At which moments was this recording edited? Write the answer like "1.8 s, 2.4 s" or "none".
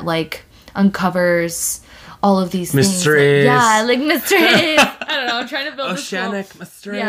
none